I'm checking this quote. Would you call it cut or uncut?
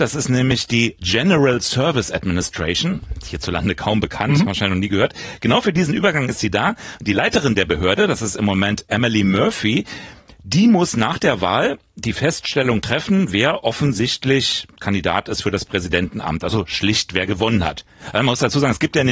uncut